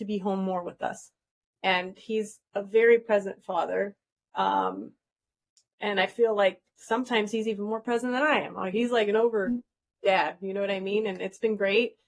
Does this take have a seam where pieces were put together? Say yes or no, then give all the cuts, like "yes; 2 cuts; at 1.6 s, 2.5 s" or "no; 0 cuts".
no; 0 cuts